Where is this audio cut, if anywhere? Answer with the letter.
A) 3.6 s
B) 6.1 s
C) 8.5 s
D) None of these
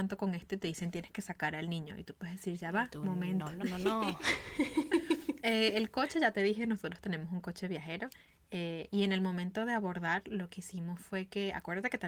A